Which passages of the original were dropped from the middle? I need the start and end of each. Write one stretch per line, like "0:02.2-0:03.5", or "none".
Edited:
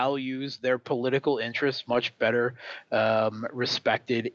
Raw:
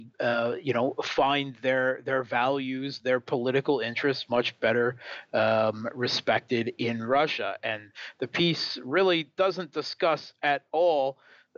none